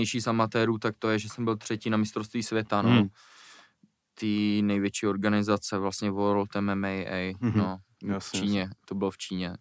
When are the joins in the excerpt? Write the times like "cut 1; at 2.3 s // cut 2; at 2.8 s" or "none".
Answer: none